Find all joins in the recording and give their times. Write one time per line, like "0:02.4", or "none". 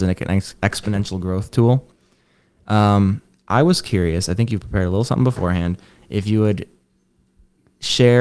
none